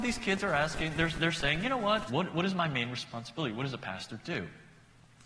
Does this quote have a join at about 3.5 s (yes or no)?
no